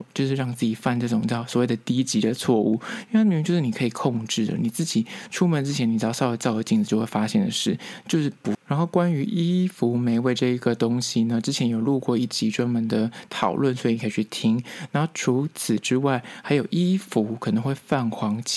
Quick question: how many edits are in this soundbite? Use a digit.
1